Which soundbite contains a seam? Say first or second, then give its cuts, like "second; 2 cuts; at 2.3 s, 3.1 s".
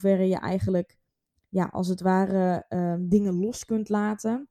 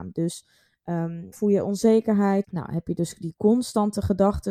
second; 2 cuts; at 1.3 s, 2.4 s